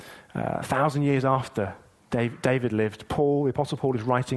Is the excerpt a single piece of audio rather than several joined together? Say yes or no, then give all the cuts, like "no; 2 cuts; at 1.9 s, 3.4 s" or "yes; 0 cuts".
yes; 0 cuts